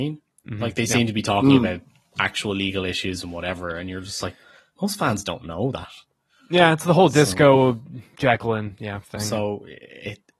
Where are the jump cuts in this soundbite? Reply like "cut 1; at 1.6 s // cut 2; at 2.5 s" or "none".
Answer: none